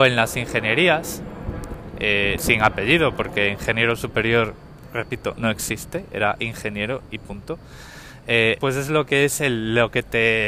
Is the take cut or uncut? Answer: cut